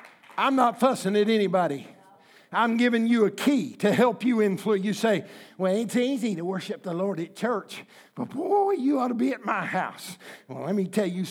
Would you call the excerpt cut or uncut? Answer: uncut